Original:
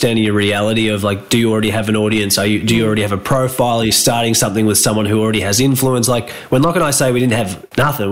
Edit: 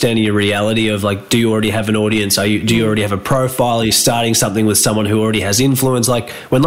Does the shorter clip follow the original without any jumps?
yes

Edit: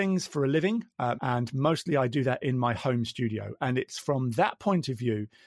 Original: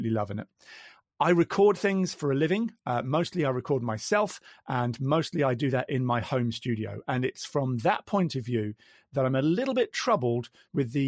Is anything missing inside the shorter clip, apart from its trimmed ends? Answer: yes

